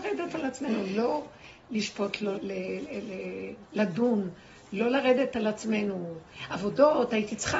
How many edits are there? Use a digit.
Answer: 1